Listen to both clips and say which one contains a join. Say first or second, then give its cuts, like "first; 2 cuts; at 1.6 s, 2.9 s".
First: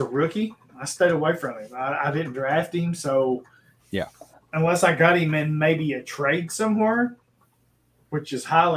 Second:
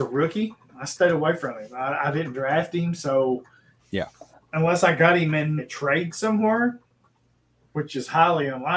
second; 1 cut; at 5.6 s